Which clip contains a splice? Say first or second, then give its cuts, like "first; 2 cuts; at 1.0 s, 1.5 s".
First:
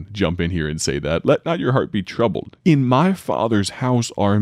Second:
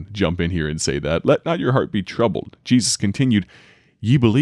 first; 1 cut; at 2.6 s